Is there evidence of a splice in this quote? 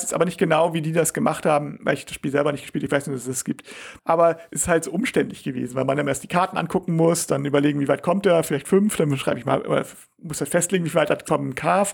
yes; 1 cut; at 4.0 s

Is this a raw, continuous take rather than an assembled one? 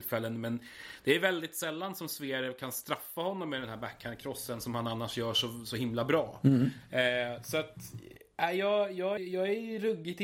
no; 1 cut; at 9.2 s

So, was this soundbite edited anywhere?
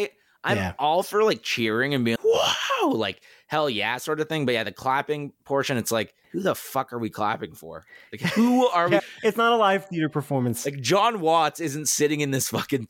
yes; 3 cuts; at 2.2 s, 6.2 s, 9.0 s

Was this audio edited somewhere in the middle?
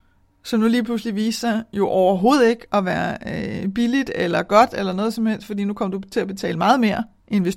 no; 0 cuts

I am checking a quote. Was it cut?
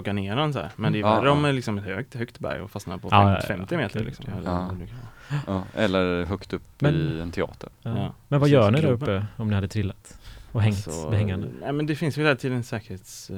no; 0 cuts

